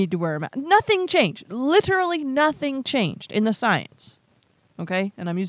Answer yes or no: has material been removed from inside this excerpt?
no